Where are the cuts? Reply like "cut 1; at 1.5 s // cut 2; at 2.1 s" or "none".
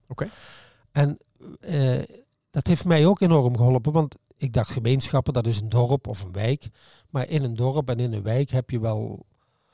none